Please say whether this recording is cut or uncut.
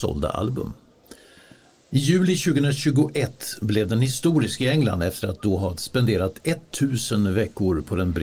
uncut